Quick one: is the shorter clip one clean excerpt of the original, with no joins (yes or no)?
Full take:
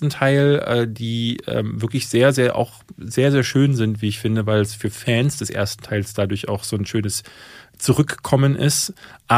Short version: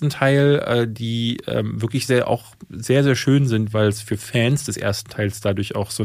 no